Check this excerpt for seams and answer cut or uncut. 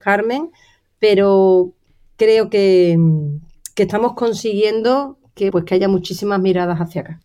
cut